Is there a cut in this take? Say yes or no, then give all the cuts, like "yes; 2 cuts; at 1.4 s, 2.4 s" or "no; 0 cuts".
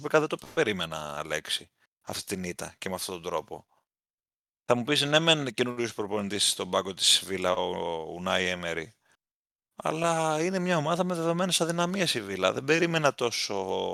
no; 0 cuts